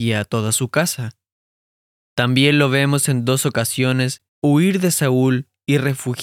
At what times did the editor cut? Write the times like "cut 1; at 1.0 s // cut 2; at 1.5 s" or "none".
cut 1; at 4.3 s